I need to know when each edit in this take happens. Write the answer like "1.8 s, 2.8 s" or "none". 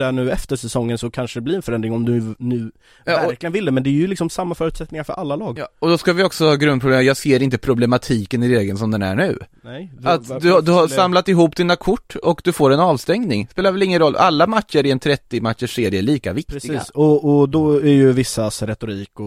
none